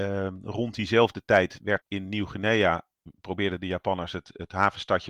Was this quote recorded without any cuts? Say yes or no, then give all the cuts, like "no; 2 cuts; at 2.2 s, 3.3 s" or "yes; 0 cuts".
no; 1 cut; at 1.8 s